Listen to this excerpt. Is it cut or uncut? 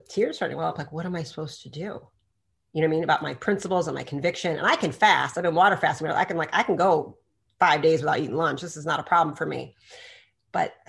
uncut